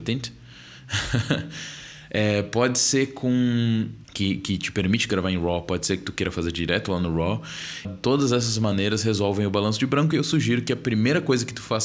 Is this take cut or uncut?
cut